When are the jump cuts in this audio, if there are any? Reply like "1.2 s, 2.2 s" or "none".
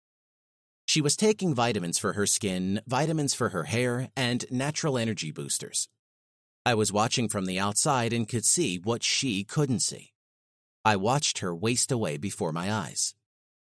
none